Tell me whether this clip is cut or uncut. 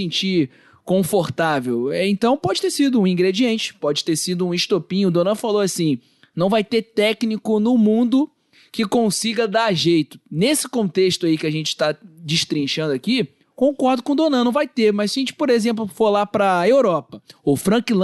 uncut